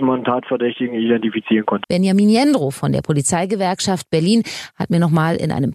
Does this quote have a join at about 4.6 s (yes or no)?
no